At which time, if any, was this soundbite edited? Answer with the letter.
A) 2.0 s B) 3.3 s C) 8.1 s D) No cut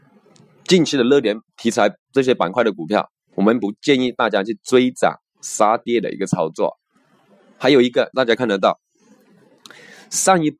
B